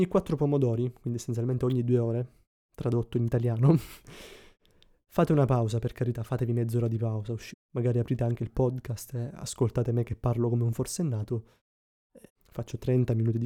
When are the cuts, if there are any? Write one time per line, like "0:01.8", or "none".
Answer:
0:07.5
0:12.3